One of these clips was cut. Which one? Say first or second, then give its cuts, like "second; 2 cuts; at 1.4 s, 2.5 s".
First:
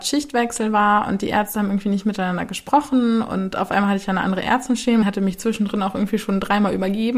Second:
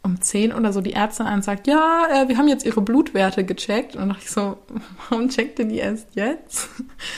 first; 1 cut; at 5.0 s